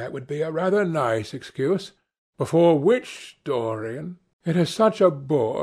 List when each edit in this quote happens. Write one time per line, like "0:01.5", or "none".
0:02.3
0:04.3